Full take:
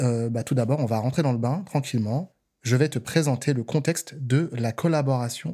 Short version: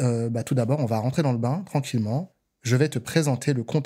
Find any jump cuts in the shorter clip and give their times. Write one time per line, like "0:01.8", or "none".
none